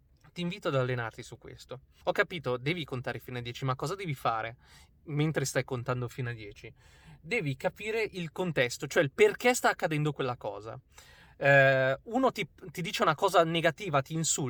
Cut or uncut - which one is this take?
cut